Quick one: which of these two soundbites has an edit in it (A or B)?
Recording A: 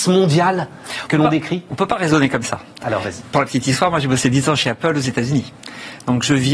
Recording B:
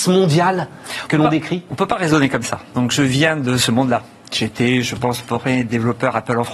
B